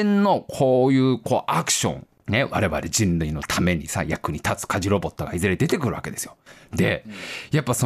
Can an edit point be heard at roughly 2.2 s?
yes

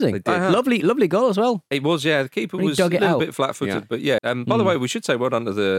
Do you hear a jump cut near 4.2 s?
yes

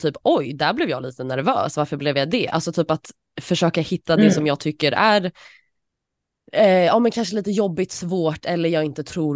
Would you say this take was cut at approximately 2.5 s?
no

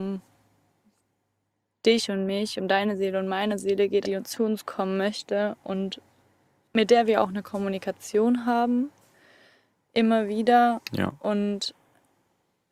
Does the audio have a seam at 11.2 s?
no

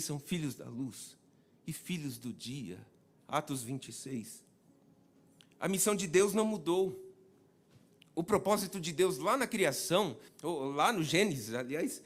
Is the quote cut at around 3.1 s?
yes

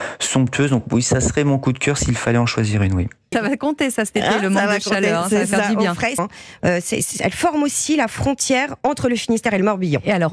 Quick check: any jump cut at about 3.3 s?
yes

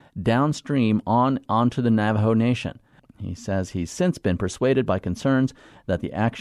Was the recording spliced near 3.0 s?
yes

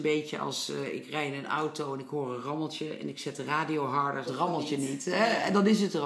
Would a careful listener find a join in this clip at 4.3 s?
yes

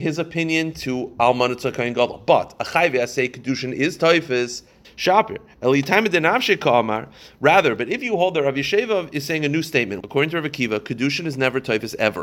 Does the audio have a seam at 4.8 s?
yes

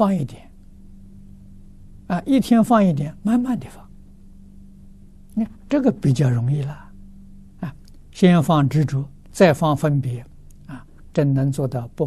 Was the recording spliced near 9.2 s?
yes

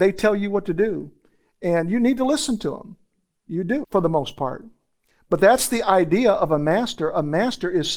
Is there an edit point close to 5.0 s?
no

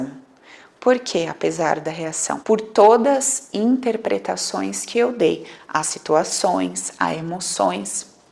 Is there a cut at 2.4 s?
yes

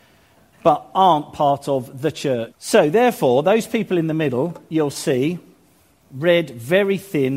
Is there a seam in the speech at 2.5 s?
yes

